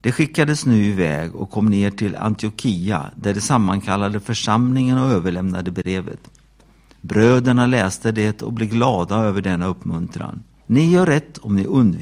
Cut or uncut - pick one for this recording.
cut